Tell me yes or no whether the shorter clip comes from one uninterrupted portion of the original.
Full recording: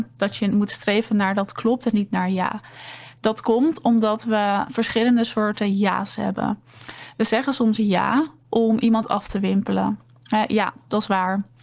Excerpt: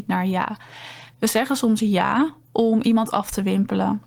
no